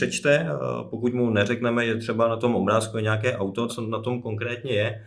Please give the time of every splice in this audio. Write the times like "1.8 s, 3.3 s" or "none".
3.7 s